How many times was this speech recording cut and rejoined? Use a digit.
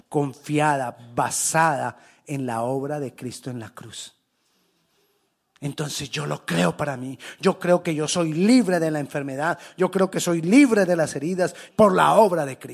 1